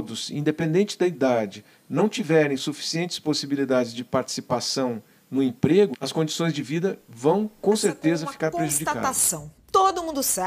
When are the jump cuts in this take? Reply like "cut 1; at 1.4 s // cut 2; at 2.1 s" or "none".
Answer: cut 1; at 5.9 s

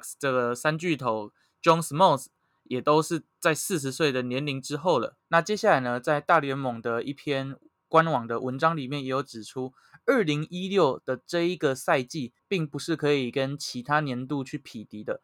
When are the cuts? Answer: cut 1; at 5.2 s // cut 2; at 12.4 s

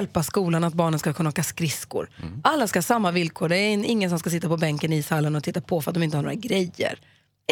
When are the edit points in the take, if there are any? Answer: none

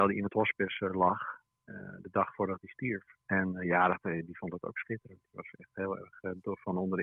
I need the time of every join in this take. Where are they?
cut 1; at 3.2 s

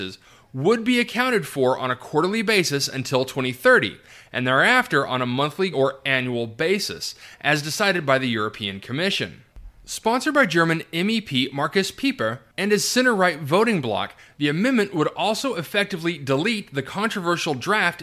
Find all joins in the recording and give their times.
cut 1; at 5.7 s // cut 2; at 14.3 s

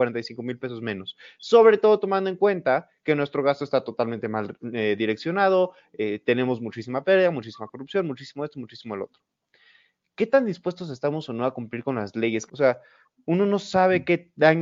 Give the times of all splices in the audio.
cut 1; at 12.5 s

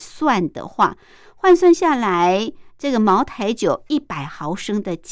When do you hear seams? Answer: none

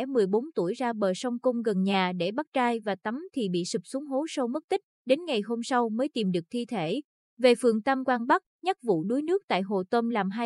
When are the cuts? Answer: cut 1; at 8.5 s

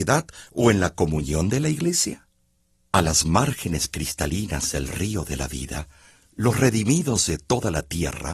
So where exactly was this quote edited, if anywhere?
none

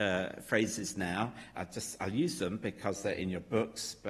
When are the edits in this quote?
cut 1; at 1.5 s

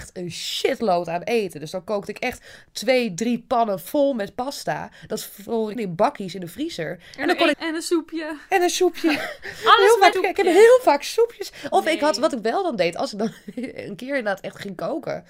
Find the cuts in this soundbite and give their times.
cut 1; at 5.8 s // cut 2; at 7.5 s // cut 3; at 10.1 s

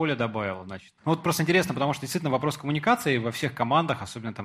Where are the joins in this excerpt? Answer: cut 1; at 1.0 s

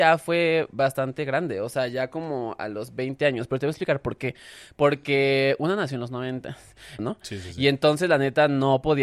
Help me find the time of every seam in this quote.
cut 1; at 7.0 s

